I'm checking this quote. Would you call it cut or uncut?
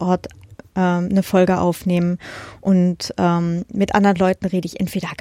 uncut